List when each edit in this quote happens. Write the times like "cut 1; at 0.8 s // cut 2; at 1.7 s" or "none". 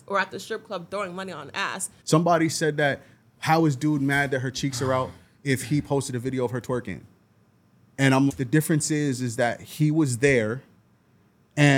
cut 1; at 2.0 s // cut 2; at 8.3 s